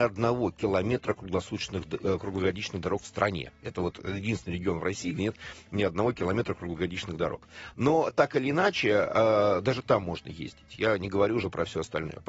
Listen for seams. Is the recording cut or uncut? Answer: cut